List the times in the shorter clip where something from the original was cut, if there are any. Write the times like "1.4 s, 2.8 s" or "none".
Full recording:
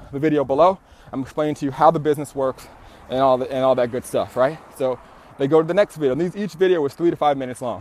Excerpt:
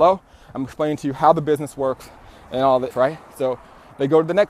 2.9 s